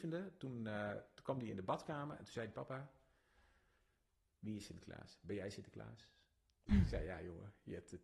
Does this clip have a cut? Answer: no; 0 cuts

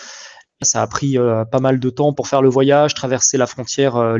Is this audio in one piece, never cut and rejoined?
no; 1 cut; at 2.1 s

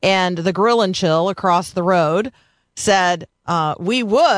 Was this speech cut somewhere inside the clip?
no; 0 cuts

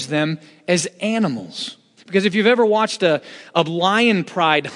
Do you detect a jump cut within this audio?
yes; 1 cut; at 2.0 s

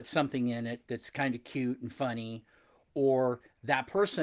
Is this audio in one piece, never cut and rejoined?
yes; 0 cuts

